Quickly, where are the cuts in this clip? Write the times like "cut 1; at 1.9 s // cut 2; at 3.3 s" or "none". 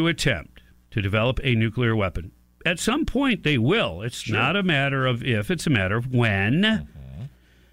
none